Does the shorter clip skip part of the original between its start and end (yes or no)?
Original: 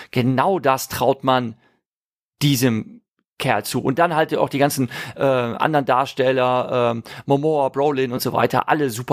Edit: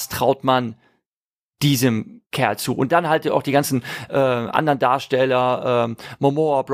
yes